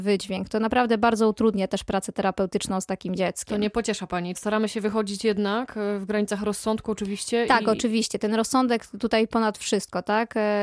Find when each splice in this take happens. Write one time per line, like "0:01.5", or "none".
0:04.3